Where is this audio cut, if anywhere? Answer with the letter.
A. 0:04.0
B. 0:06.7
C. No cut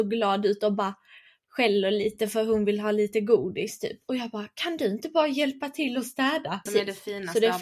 B